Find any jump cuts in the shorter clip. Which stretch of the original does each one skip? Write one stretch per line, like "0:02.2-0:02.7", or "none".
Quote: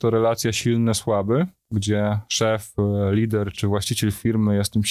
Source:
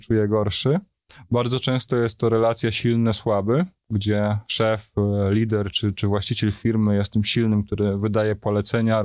0:05.7-0:05.9